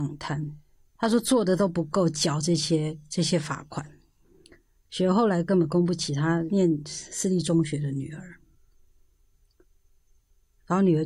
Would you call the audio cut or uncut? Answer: cut